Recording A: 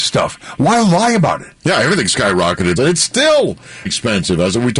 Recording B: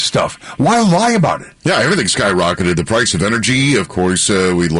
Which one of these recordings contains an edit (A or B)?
A